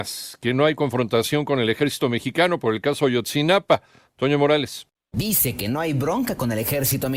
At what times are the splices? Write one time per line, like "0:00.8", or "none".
none